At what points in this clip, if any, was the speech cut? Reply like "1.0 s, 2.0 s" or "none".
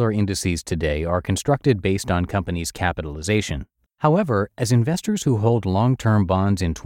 3.9 s